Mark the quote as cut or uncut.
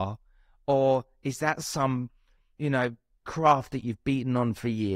uncut